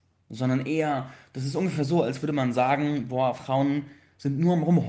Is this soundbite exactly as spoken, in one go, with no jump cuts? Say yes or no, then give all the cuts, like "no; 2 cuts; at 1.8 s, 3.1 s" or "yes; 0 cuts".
yes; 0 cuts